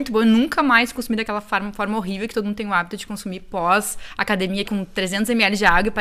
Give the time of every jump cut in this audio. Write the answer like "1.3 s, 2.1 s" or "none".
4.6 s